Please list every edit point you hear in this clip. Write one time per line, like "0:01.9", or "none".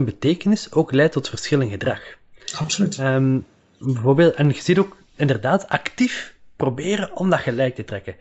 none